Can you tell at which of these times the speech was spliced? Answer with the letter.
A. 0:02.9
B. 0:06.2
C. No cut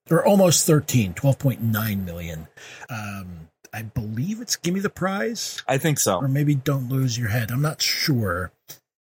A